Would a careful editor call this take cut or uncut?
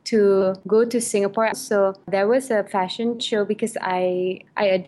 cut